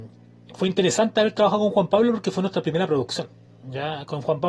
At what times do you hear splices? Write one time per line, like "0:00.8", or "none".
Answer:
none